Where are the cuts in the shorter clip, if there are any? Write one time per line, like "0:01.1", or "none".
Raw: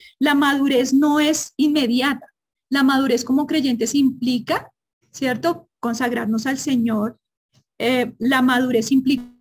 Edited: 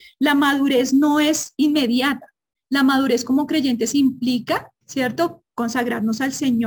0:04.8